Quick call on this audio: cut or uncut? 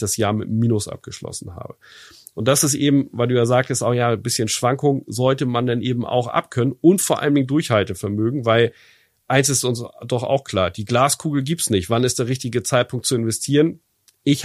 uncut